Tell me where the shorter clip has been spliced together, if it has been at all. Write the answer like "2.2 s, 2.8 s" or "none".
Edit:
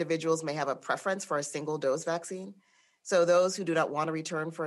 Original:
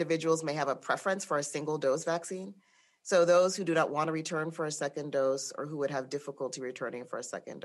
none

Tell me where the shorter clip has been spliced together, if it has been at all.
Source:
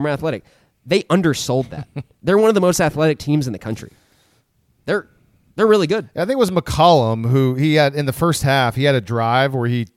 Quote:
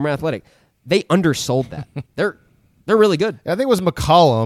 2.1 s

